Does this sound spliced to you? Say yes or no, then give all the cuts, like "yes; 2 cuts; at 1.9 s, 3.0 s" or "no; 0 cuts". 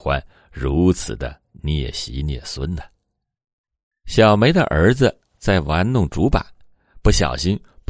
yes; 1 cut; at 3.9 s